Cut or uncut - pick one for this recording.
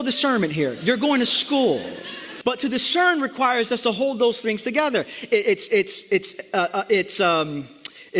cut